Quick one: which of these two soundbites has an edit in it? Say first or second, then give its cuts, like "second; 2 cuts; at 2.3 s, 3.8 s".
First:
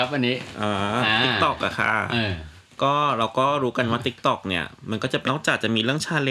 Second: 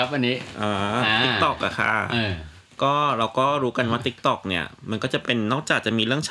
first; 1 cut; at 5.3 s